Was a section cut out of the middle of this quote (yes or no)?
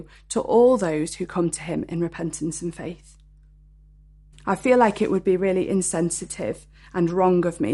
yes